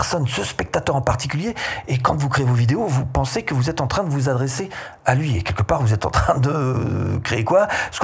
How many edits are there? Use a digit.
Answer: 0